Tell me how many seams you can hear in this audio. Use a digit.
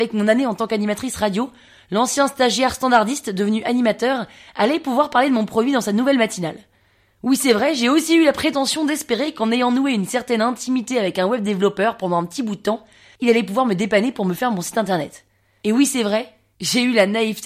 0